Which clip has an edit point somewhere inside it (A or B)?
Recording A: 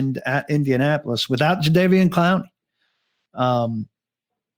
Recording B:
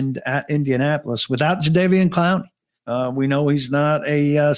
B